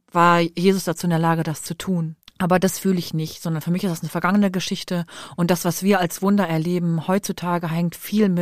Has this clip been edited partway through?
yes; 1 cut; at 2.2 s

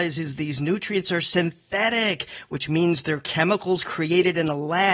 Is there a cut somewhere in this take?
no; 0 cuts

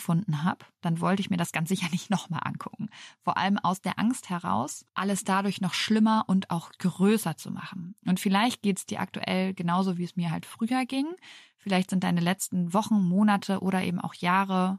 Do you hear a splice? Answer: no; 0 cuts

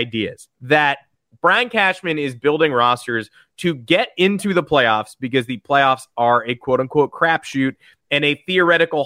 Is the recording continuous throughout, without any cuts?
yes; 0 cuts

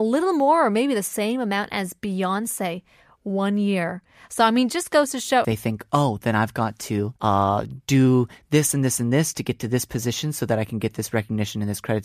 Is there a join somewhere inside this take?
yes; 2 cuts; at 5.4 s, 7.2 s

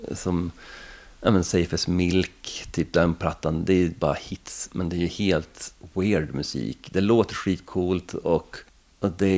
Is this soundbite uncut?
yes; 0 cuts

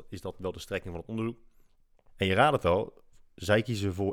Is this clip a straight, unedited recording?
no; 1 cut; at 2.1 s

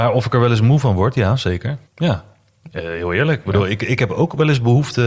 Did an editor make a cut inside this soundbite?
yes; 1 cut; at 1.9 s

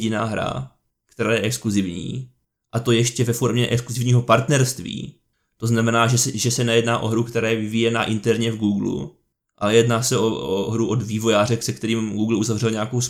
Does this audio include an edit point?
no; 0 cuts

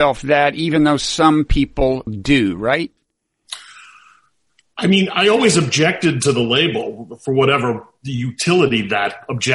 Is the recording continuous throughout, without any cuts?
no; 1 cut; at 2.1 s

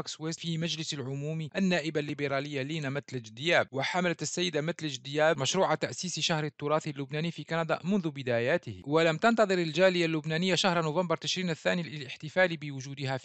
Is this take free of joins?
yes; 0 cuts

